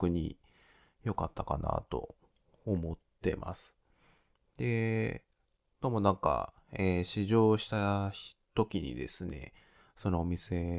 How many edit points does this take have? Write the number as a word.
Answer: zero